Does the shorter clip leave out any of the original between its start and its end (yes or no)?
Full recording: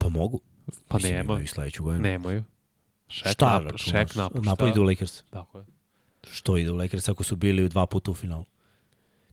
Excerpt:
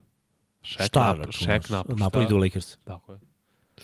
no